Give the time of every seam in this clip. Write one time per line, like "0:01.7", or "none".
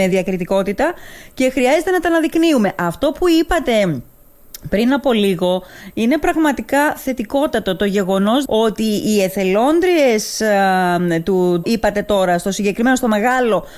0:08.5
0:11.6